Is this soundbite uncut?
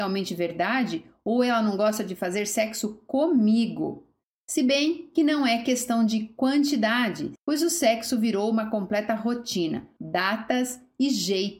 no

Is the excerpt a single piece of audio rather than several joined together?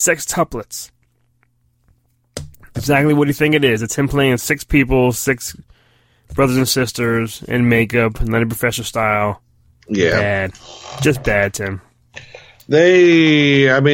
yes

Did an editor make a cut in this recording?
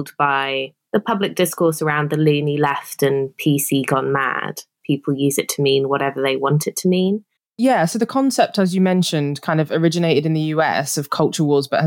yes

